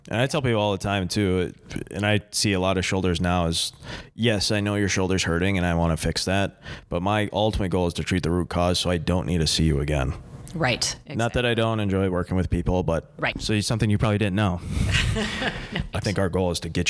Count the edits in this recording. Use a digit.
2